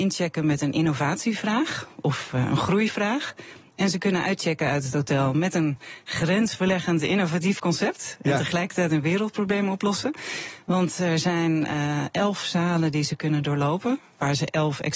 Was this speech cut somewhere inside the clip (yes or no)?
no